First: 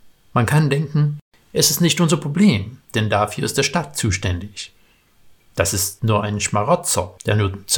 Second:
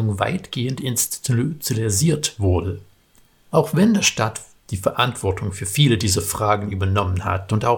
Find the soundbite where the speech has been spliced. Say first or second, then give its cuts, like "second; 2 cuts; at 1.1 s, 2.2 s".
second; 1 cut; at 3.4 s